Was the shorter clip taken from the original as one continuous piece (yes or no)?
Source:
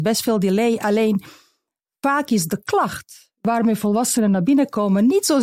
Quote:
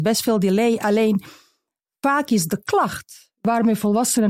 yes